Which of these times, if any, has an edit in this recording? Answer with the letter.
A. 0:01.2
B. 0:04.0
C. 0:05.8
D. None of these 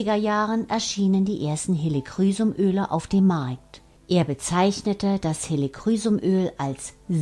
B